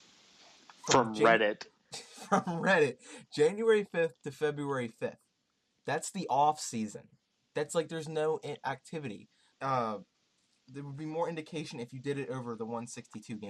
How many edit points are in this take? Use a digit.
1